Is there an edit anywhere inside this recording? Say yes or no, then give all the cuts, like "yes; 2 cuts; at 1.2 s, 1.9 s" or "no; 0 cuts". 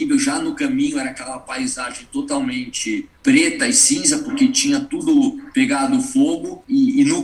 no; 0 cuts